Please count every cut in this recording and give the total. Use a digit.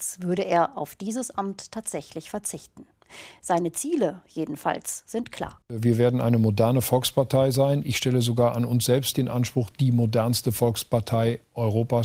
1